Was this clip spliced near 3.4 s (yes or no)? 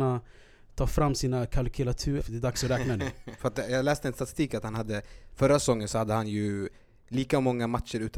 yes